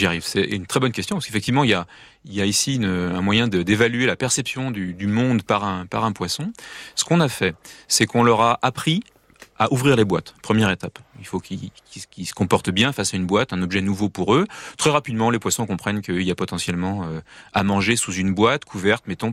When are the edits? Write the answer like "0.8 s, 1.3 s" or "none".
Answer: none